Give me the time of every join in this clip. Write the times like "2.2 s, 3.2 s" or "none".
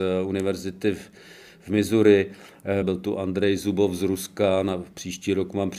2.8 s